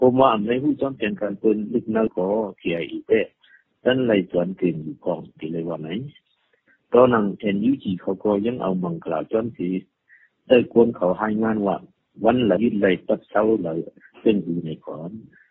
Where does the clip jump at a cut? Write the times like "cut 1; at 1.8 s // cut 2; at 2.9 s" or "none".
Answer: cut 1; at 2.1 s // cut 2; at 12.6 s